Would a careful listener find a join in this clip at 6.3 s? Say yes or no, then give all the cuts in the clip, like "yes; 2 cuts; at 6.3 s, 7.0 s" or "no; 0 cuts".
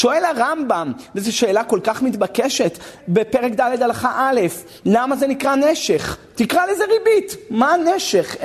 no; 1 cut; at 3.0 s